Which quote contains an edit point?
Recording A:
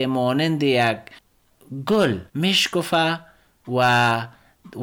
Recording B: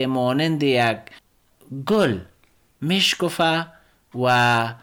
A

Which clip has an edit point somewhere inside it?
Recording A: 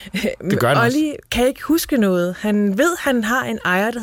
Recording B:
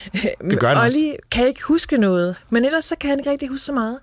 B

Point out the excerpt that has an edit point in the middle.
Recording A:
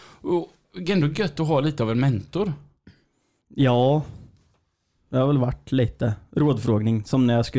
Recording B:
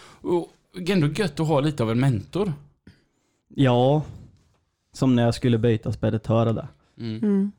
B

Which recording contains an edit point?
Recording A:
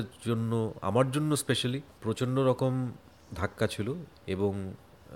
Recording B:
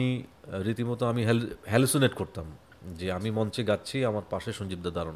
A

